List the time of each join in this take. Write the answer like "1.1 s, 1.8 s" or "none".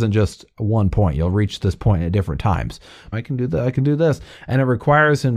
3.1 s